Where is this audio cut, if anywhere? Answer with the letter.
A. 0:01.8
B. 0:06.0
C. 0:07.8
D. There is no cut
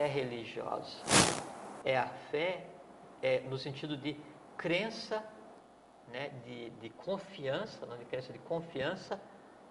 A